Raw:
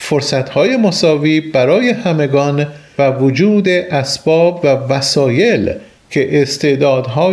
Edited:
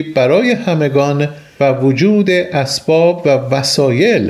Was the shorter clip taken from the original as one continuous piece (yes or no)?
yes